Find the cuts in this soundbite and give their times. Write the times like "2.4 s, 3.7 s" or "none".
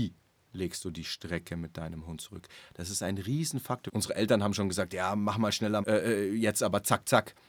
3.9 s, 5.8 s